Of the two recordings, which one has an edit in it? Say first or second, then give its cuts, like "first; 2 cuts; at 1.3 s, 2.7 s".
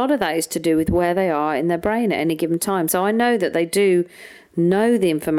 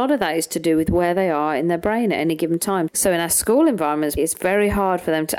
second; 2 cuts; at 2.9 s, 4.2 s